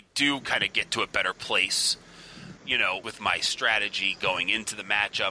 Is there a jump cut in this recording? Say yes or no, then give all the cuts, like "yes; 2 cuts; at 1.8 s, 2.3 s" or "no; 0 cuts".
yes; 1 cut; at 3.0 s